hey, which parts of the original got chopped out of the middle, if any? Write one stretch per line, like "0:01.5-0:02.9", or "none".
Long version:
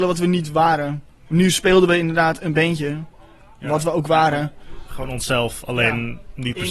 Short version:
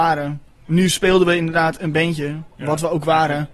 0:03.2-0:03.6